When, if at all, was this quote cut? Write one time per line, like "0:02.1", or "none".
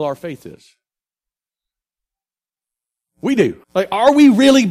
0:03.6